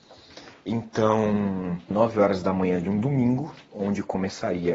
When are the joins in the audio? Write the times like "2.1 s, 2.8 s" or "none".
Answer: 1.9 s